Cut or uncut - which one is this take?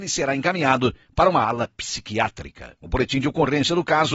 cut